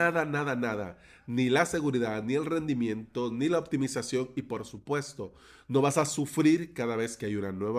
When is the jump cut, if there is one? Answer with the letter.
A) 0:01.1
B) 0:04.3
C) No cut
C